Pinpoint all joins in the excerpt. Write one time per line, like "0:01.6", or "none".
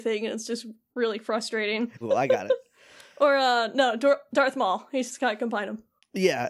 0:02.0